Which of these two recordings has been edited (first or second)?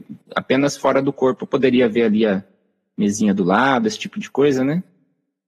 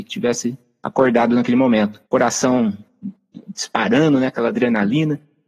second